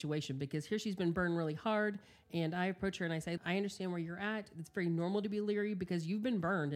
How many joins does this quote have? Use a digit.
1